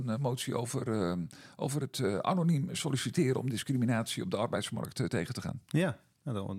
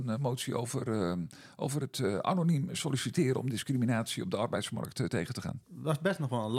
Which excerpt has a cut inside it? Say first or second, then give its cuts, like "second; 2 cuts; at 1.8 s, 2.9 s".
second; 1 cut; at 5.6 s